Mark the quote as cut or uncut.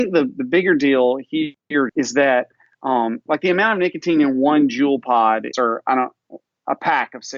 cut